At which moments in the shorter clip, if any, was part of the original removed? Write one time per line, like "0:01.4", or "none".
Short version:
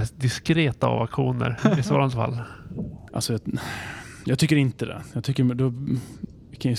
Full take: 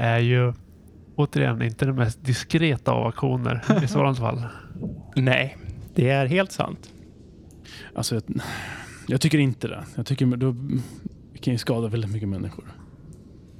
0:03.1